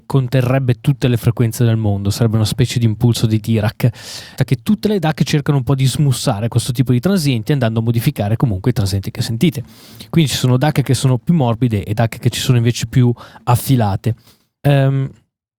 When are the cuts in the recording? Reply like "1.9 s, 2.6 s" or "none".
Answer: 4.4 s, 14.6 s